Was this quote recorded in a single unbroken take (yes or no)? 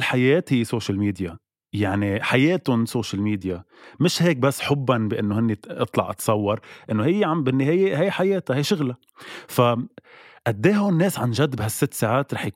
yes